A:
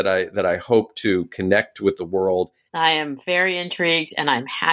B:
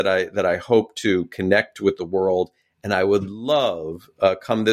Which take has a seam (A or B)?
A